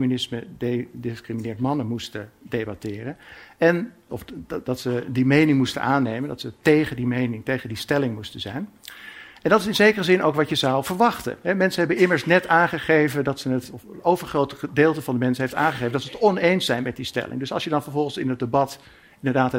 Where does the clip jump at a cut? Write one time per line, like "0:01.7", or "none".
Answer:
0:04.1